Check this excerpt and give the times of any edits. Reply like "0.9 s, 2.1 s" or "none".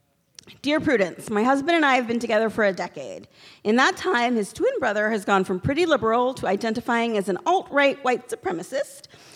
none